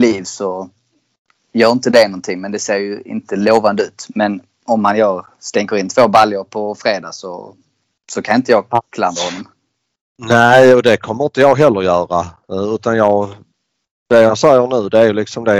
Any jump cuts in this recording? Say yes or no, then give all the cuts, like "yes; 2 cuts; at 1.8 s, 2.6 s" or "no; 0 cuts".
no; 0 cuts